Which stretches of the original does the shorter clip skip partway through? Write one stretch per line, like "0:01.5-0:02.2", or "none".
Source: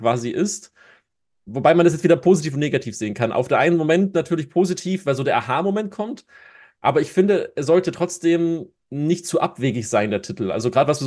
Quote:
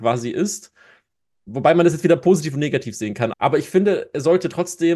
0:03.3-0:06.8